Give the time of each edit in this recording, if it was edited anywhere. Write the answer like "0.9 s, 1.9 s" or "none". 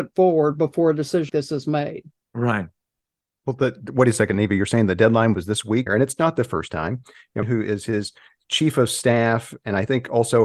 1.3 s, 5.9 s, 7.4 s